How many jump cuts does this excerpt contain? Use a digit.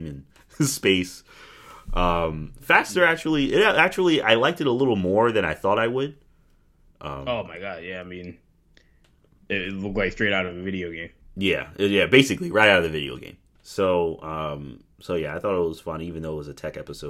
1